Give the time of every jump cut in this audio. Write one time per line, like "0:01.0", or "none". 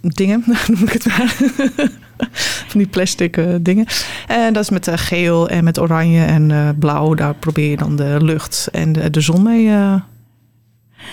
none